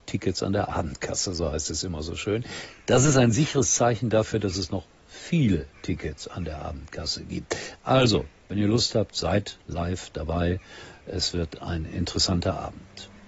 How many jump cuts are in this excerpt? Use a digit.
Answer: 0